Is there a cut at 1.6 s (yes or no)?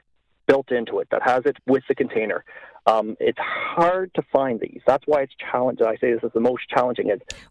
yes